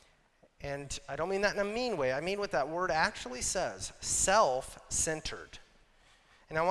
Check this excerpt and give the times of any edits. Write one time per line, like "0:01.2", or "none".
none